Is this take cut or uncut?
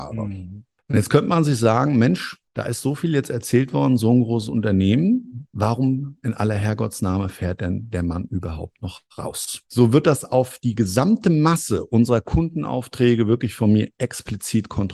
cut